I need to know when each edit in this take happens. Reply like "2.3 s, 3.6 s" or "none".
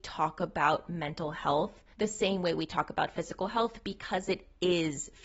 1.9 s